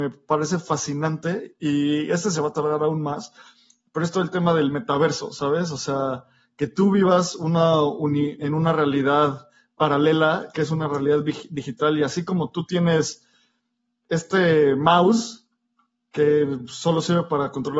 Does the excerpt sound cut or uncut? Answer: uncut